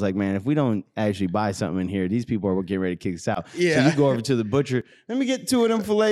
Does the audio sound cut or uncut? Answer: uncut